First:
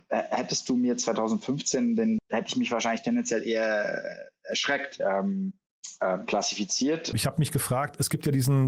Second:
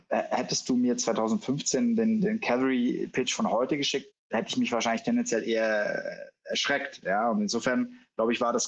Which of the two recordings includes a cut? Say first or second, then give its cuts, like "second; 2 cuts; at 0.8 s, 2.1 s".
first; 3 cuts; at 2.2 s, 5.0 s, 7.1 s